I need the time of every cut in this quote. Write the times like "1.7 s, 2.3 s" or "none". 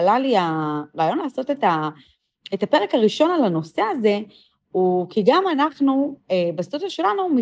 none